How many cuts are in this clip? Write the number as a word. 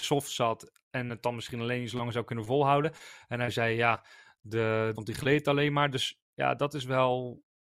one